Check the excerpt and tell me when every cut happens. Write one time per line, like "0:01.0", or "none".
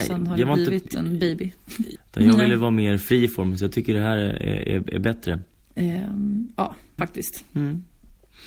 0:01.9
0:05.6
0:07.0